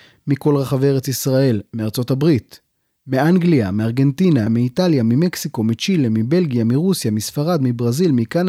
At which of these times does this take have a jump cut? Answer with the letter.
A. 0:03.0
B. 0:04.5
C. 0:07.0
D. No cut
B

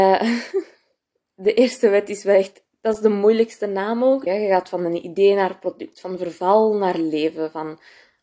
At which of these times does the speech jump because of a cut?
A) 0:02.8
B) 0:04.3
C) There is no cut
B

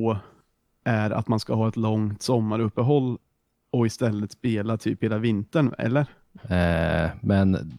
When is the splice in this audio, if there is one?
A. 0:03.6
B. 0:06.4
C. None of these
B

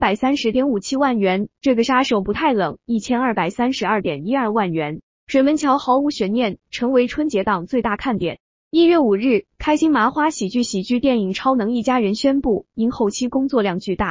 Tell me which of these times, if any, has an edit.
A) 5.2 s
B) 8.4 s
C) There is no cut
C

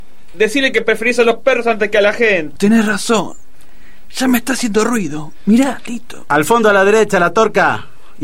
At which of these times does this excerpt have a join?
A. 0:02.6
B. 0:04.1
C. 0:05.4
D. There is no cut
A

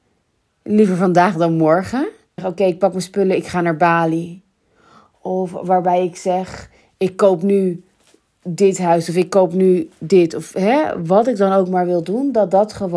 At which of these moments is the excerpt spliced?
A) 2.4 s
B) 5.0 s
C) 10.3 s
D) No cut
A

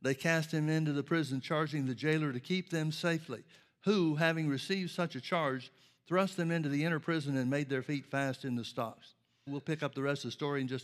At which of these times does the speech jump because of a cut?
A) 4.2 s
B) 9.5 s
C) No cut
B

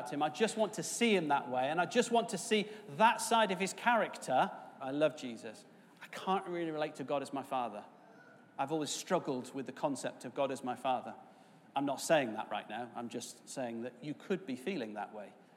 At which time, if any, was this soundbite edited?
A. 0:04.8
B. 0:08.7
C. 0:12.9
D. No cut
A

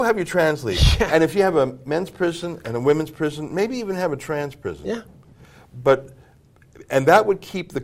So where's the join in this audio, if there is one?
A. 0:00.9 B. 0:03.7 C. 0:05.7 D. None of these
D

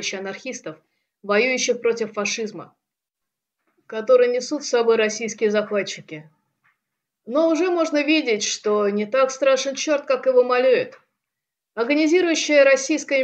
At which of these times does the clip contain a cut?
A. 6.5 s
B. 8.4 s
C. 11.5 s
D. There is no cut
D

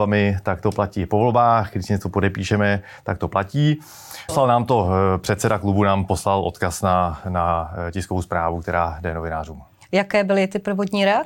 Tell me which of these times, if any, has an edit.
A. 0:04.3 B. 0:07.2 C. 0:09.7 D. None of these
A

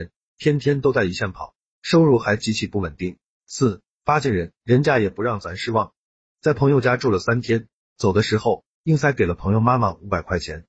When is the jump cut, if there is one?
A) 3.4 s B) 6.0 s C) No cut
A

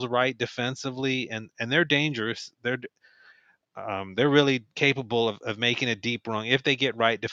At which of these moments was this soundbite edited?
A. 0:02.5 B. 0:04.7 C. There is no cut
B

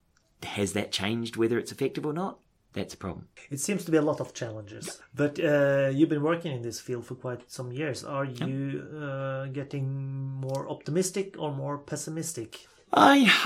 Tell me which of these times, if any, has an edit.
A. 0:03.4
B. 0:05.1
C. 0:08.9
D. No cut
D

